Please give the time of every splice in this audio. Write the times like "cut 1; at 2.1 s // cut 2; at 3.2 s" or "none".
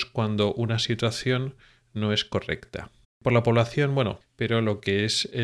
cut 1; at 3.0 s // cut 2; at 4.2 s

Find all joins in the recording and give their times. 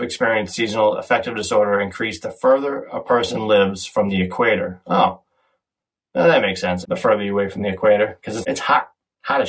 cut 1; at 6.8 s // cut 2; at 8.4 s

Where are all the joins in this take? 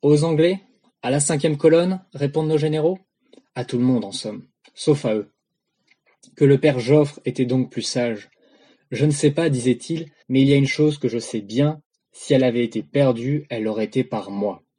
cut 1; at 10.2 s

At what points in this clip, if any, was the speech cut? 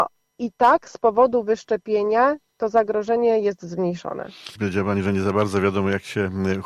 cut 1; at 4.6 s

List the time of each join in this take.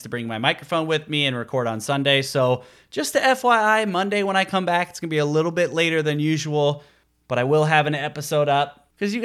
none

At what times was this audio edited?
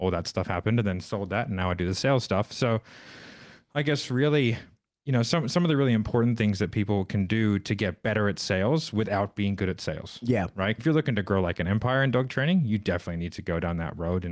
cut 1; at 10.8 s

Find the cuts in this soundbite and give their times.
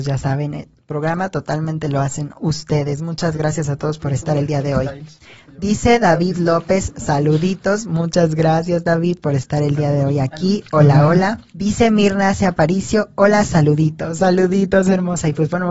cut 1; at 11.5 s

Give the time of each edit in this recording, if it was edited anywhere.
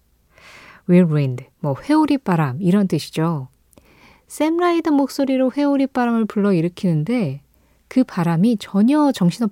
none

